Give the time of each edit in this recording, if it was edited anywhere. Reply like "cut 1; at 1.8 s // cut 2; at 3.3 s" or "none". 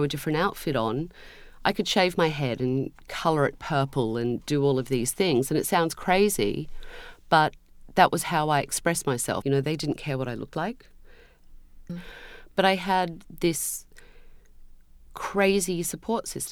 cut 1; at 9.4 s // cut 2; at 11.9 s